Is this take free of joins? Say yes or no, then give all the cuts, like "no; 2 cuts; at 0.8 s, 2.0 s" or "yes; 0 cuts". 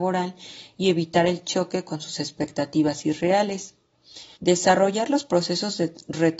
no; 1 cut; at 4.3 s